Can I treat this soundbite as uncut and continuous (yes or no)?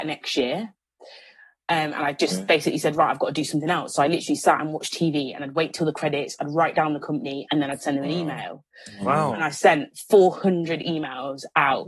yes